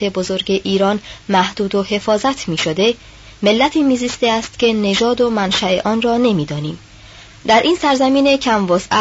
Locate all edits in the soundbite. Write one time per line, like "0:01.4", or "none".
0:07.3